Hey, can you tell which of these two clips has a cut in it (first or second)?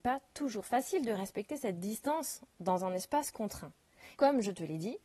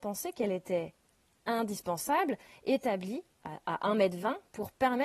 first